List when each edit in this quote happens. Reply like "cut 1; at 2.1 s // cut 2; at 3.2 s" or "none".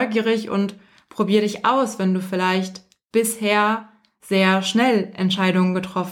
none